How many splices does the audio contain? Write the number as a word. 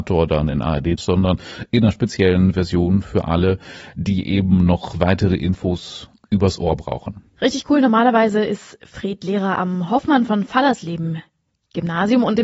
two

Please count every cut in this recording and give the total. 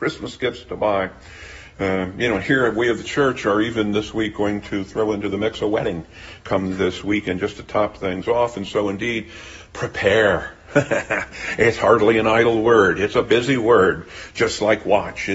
zero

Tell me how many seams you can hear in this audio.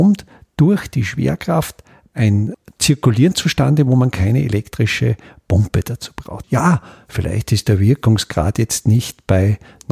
one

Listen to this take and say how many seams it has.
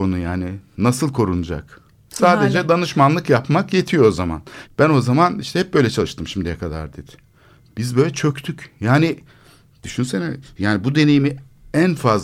two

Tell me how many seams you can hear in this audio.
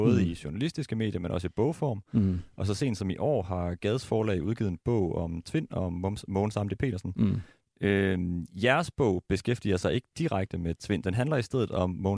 zero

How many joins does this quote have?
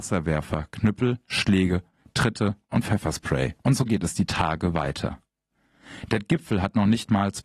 one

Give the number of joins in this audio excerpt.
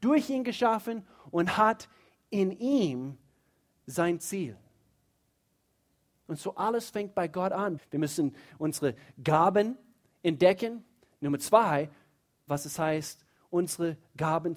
two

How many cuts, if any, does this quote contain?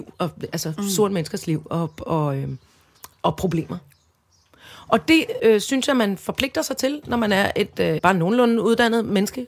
two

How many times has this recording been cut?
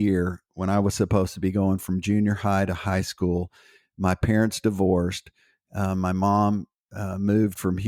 zero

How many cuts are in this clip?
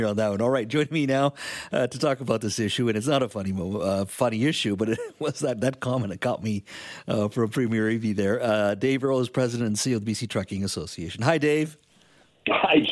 zero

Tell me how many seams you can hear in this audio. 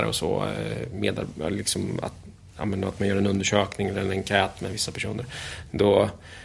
zero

